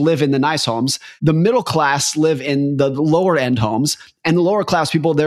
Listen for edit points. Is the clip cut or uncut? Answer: uncut